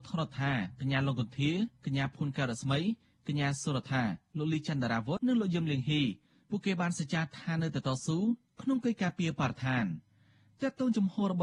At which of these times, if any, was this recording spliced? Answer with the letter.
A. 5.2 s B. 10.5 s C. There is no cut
A